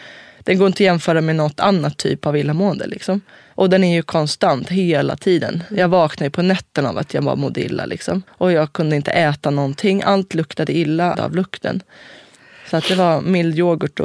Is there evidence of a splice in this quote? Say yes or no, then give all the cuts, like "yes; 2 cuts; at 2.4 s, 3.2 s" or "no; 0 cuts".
yes; 2 cuts; at 8.3 s, 11.1 s